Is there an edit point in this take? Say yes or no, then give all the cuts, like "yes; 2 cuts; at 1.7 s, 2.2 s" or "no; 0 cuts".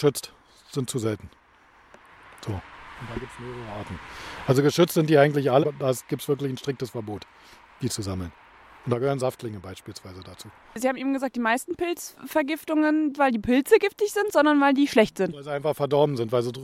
yes; 2 cuts; at 5.6 s, 13.1 s